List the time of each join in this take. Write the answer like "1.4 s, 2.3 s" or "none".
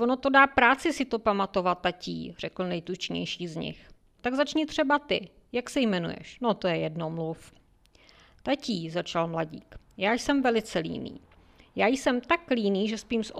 4.2 s